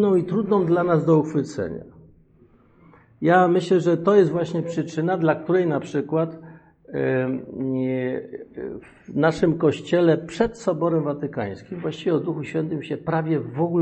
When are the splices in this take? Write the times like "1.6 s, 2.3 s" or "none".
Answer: none